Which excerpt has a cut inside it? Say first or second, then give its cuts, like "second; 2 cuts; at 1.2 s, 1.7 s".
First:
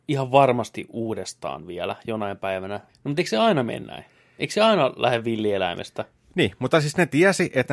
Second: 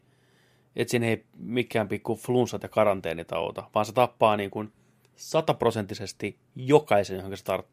first; 1 cut; at 2.9 s